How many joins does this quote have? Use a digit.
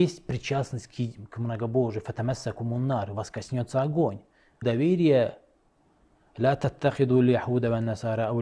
1